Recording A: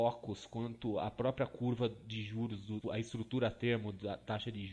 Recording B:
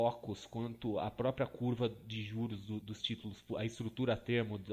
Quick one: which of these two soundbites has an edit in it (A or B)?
A